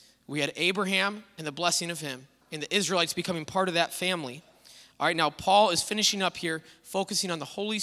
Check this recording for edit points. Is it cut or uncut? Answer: cut